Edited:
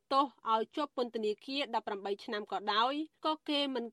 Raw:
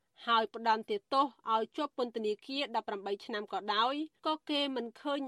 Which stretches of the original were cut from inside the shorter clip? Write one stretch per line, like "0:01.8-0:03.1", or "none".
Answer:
none

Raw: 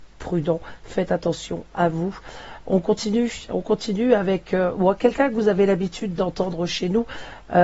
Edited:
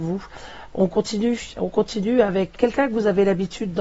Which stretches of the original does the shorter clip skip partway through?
0:04.5-0:05.0

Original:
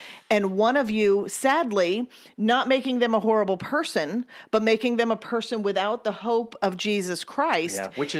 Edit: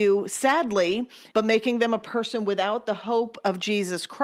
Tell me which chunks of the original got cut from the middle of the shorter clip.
0:02.3-0:04.5

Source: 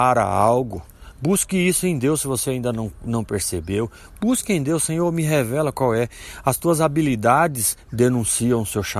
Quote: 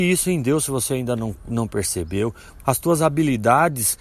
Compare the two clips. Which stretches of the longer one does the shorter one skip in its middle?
0:04.2-0:06.4

